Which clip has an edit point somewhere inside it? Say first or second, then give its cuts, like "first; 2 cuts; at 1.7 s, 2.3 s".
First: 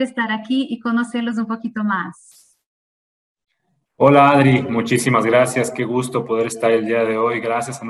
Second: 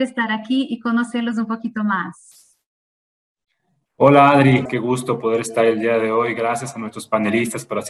second; 1 cut; at 4.7 s